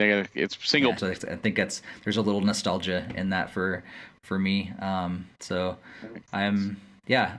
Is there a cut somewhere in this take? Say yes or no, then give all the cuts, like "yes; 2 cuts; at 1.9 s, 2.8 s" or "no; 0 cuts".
yes; 1 cut; at 1.0 s